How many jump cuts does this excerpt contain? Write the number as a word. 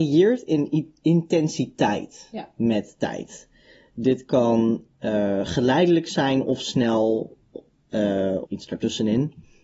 one